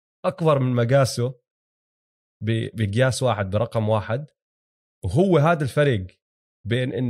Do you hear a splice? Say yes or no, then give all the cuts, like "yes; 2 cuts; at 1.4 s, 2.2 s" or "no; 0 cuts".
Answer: no; 0 cuts